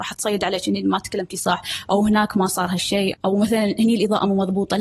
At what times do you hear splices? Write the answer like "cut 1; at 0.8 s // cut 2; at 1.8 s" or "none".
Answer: cut 1; at 3.1 s